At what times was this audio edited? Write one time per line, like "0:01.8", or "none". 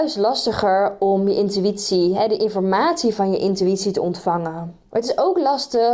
0:04.9